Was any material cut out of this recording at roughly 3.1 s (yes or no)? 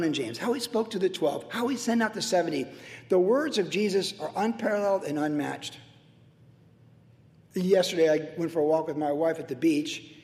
no